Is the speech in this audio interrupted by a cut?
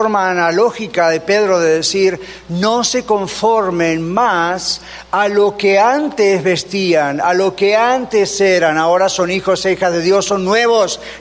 no; 0 cuts

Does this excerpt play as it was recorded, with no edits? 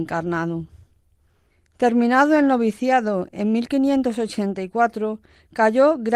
yes; 0 cuts

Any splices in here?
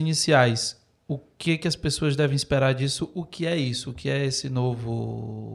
no; 0 cuts

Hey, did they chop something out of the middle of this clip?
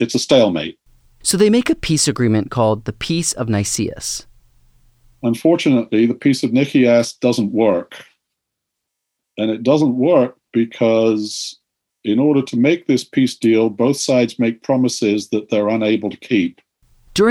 no; 0 cuts

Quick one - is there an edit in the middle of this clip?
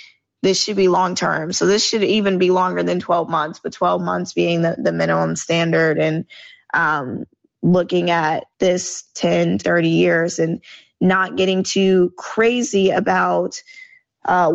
yes; 2 cuts; at 8.5 s, 9.6 s

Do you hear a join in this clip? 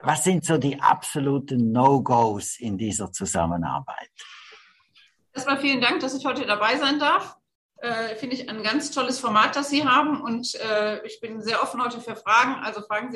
no; 0 cuts

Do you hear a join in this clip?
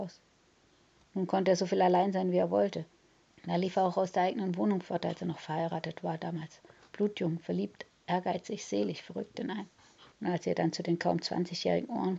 yes; 2 cuts; at 3.2 s, 10.1 s

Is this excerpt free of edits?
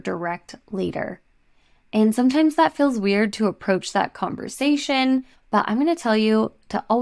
no; 1 cut; at 5.3 s

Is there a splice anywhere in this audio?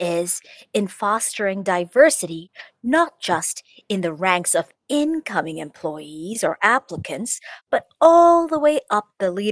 no; 0 cuts

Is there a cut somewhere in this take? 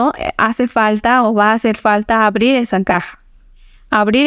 no; 0 cuts

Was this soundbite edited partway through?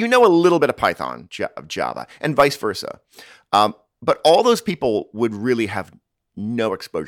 yes; 1 cut; at 1.3 s

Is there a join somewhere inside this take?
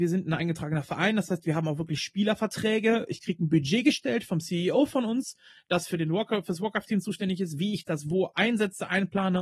no; 0 cuts

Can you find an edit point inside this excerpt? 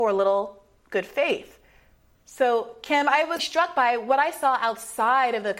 yes; 2 cuts; at 2.2 s, 3.4 s

